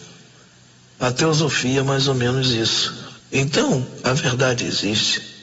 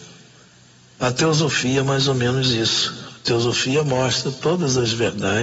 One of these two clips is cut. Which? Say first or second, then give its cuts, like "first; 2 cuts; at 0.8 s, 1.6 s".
first; 1 cut; at 3.2 s